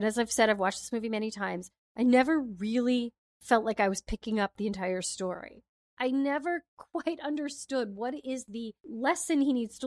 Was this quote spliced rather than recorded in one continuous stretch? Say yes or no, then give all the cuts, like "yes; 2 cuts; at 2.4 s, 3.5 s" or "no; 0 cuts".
yes; 1 cut; at 5.9 s